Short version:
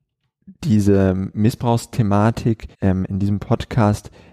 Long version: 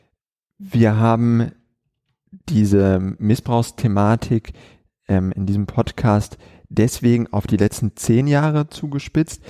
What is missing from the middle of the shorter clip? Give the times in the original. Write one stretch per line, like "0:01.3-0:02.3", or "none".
0:04.6-0:05.0

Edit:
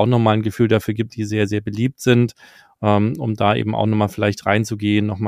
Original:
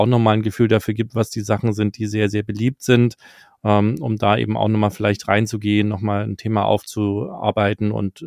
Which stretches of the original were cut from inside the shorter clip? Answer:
0:01.1-0:01.9

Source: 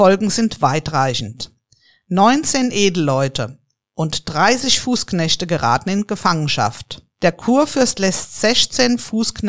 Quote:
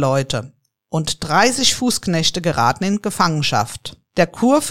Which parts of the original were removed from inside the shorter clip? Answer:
none

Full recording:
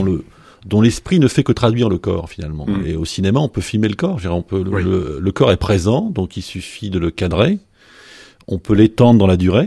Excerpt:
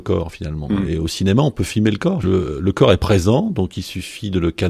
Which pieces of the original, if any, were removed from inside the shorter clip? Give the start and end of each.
0:04.2-0:04.8

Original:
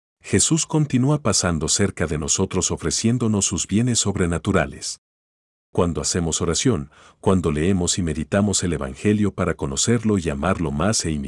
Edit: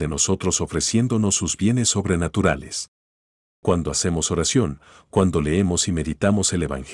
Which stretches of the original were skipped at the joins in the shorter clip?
none

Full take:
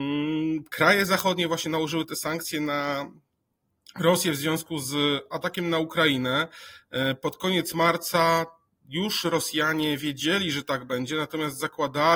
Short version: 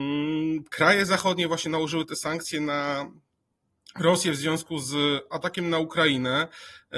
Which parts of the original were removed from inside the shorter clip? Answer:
none

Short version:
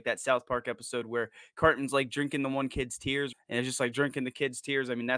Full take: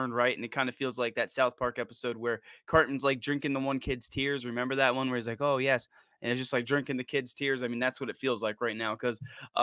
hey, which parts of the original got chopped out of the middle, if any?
0:04.4-0:06.0

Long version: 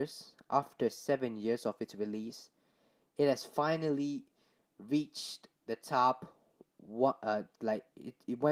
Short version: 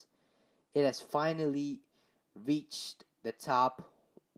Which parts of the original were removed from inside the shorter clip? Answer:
none

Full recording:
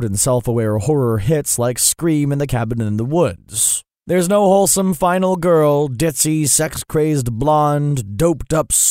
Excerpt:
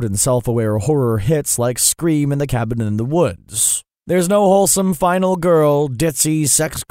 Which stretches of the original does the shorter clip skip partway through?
none

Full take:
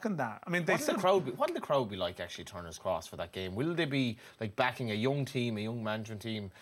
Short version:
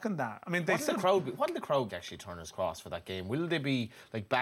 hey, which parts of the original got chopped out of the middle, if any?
0:01.9-0:02.2

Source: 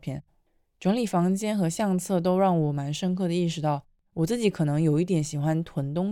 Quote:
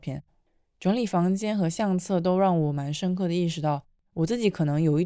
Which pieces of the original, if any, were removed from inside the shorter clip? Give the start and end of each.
none

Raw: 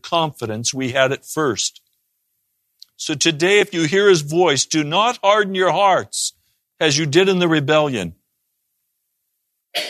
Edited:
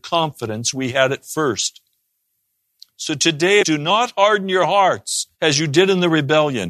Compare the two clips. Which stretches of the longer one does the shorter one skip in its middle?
0:03.6-0:04.7
0:06.4-0:06.7

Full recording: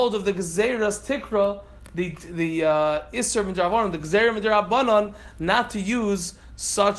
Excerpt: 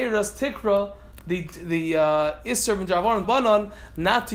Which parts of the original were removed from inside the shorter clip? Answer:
0:03.9-0:04.7

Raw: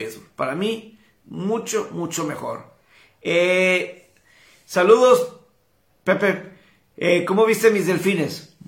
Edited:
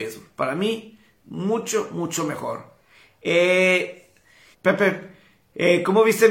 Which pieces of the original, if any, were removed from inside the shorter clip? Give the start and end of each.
0:04.5-0:05.9

